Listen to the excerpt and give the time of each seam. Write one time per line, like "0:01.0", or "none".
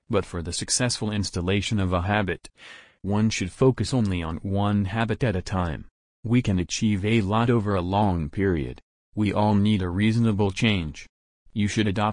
0:06.0
0:09.0